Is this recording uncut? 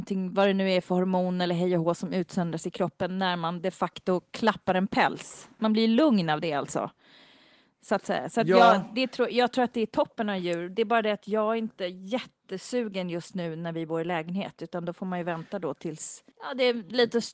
no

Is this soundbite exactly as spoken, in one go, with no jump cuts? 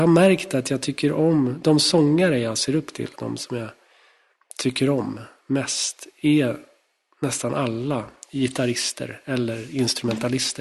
yes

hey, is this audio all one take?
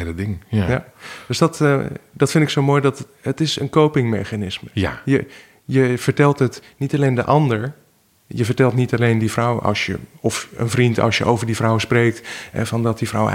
yes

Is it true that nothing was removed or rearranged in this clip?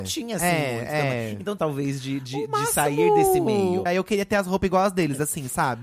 no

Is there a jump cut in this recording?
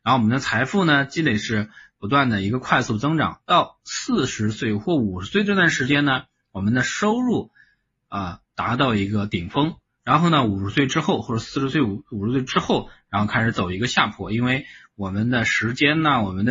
no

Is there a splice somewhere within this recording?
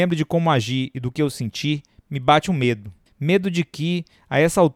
yes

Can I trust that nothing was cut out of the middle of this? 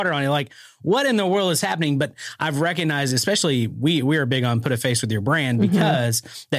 yes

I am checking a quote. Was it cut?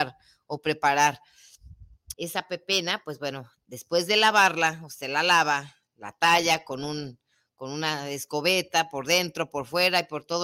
yes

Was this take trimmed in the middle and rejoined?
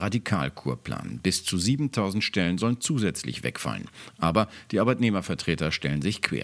no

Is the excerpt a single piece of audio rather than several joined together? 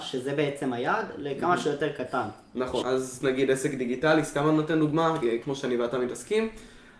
no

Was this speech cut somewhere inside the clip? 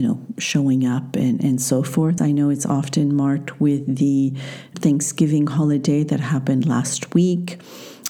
yes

